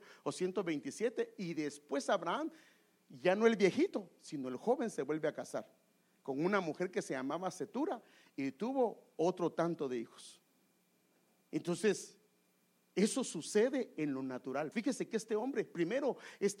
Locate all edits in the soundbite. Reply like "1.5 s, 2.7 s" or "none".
11.4 s, 14.7 s